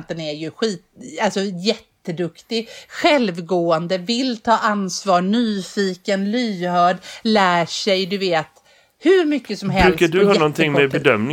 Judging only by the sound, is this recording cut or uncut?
uncut